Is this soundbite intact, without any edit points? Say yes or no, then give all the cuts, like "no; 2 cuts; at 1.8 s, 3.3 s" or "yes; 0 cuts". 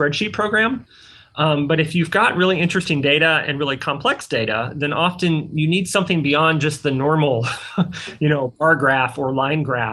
yes; 0 cuts